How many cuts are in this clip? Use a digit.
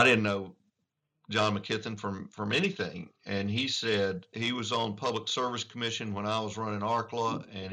0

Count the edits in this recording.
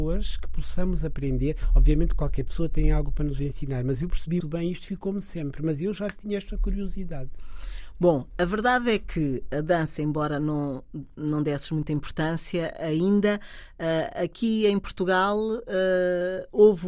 1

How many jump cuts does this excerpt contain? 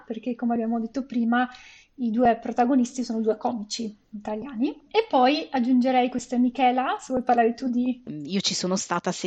1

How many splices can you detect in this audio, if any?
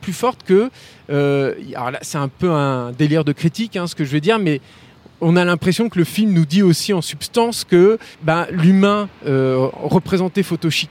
1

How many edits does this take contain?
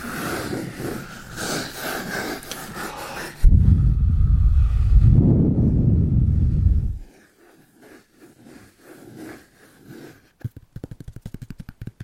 0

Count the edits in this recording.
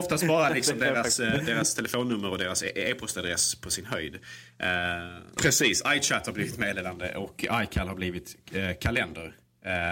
1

